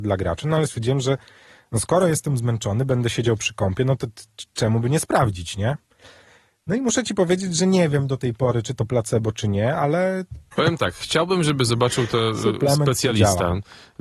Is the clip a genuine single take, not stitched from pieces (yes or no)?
yes